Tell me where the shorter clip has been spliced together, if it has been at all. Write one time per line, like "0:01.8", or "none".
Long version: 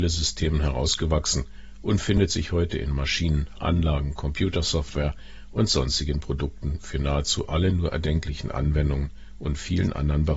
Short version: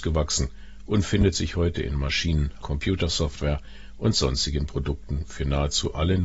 0:02.6